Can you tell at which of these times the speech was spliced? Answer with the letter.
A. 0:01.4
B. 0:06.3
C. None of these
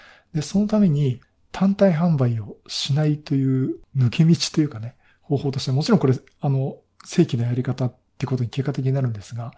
C